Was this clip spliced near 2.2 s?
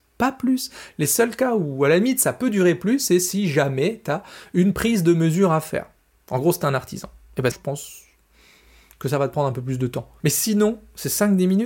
no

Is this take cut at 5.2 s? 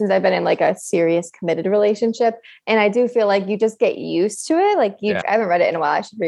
yes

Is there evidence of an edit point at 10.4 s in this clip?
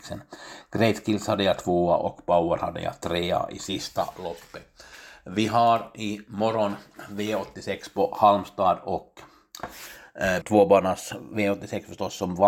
yes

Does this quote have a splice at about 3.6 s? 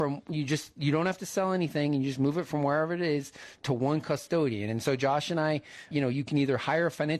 yes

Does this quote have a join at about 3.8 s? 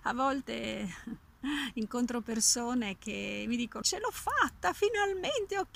yes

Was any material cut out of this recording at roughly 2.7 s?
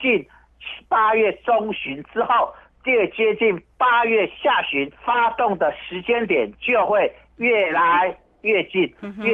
no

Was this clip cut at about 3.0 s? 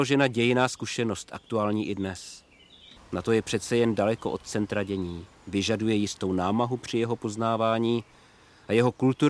yes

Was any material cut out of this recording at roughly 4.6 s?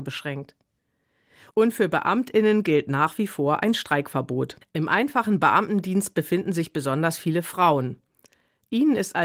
yes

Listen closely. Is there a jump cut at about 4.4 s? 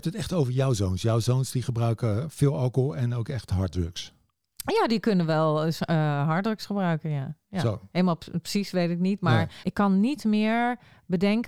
no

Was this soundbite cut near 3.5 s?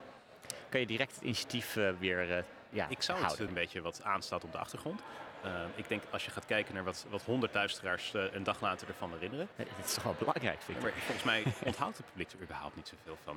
yes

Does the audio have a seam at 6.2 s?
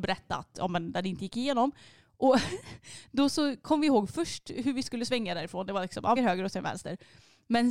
yes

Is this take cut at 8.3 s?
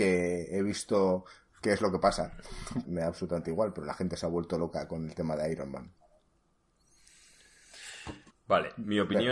yes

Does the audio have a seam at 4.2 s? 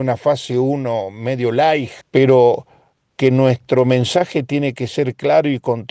no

